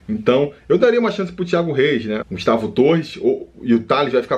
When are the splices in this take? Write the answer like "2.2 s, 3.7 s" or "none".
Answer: 2.2 s